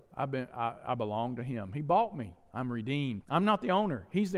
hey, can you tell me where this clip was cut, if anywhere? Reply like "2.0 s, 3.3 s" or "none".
3.2 s